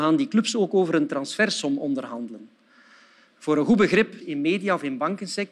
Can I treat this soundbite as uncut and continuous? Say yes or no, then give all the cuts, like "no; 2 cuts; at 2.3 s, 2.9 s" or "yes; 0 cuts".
no; 1 cut; at 4.2 s